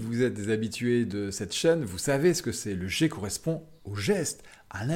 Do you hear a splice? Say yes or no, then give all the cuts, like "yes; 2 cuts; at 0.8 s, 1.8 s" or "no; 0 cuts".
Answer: no; 0 cuts